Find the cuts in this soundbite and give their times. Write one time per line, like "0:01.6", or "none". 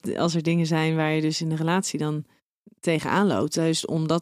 none